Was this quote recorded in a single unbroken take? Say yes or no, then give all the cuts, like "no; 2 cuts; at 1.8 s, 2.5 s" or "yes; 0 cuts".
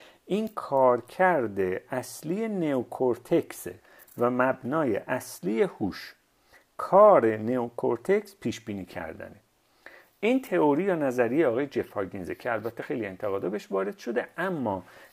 yes; 0 cuts